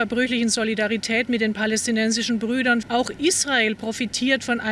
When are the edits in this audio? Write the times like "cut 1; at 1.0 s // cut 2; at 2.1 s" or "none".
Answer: cut 1; at 2.8 s